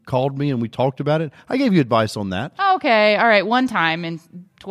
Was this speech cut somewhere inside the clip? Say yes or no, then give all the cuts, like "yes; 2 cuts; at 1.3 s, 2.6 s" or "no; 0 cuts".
no; 0 cuts